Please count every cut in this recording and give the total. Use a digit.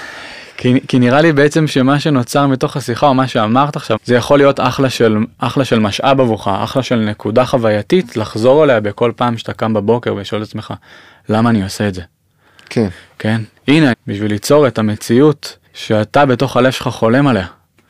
3